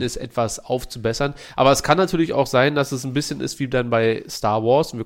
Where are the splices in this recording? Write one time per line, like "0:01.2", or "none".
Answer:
none